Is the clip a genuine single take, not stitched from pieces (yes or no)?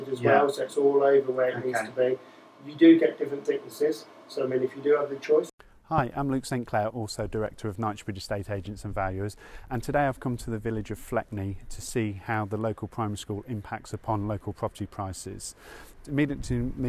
no